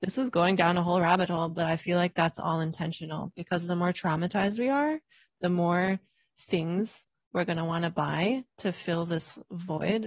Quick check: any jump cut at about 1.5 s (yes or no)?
no